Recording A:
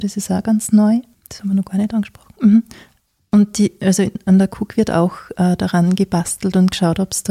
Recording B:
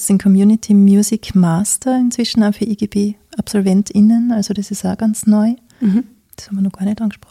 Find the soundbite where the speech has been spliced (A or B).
A